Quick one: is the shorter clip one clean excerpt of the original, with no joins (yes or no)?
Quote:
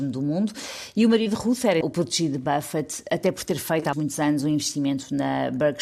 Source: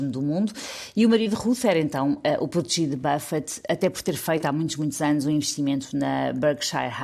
no